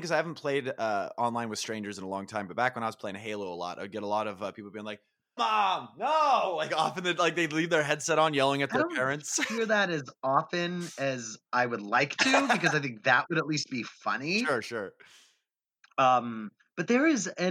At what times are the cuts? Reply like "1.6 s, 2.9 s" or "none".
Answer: 5.4 s